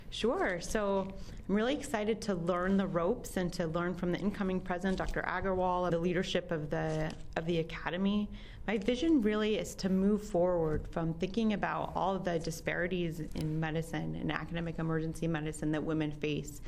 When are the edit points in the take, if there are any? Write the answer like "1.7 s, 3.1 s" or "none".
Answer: 5.9 s